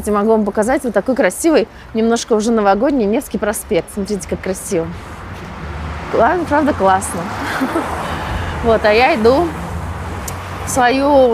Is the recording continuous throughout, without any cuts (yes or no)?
yes